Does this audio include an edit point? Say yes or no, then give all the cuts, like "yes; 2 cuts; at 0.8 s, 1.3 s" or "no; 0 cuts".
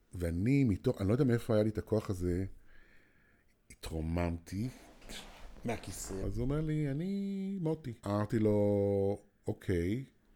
yes; 2 cuts; at 6.2 s, 8.0 s